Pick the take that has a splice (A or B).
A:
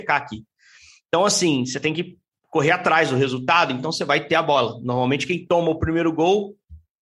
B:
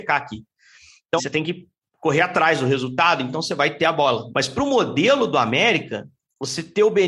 B